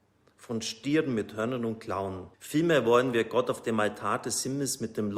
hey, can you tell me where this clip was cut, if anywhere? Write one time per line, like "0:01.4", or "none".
0:02.3

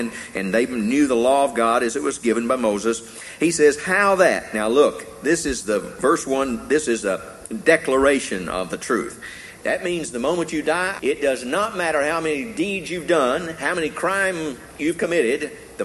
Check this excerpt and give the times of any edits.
0:09.6
0:11.0

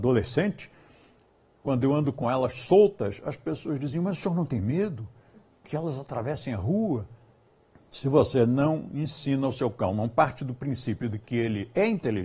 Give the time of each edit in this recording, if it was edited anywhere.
0:07.7

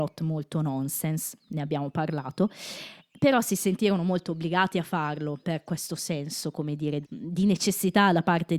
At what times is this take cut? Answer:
0:05.4
0:07.0

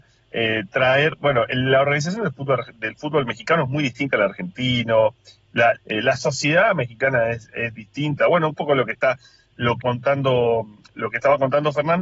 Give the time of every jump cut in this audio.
0:05.7
0:08.2
0:09.8

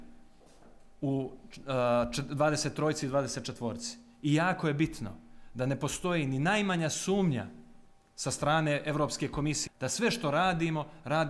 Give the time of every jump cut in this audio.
0:09.7

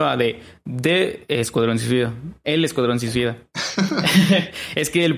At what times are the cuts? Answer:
none

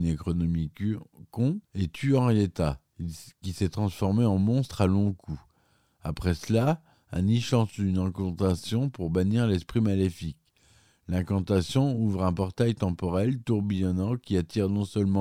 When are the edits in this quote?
0:01.6

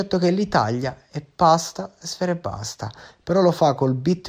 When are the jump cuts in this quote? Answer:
none

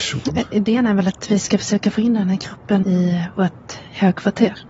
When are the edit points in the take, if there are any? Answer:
0:02.8

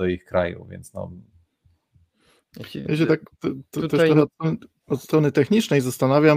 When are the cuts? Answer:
none

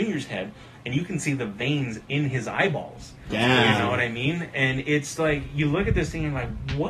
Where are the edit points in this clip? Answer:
none

